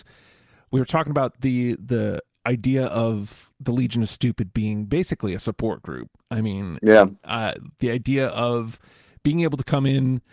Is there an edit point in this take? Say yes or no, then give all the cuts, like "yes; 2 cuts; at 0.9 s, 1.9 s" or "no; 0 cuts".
no; 0 cuts